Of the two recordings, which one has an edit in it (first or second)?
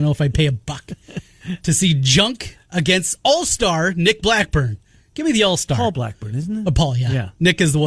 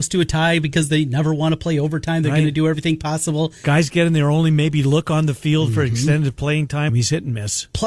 second